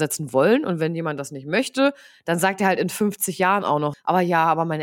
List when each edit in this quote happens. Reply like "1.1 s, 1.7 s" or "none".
3.9 s